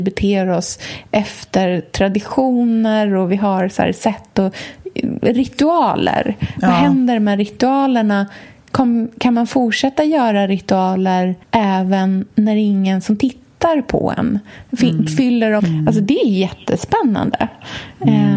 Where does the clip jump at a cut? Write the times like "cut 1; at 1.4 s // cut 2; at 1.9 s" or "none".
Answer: cut 1; at 11.4 s // cut 2; at 15.6 s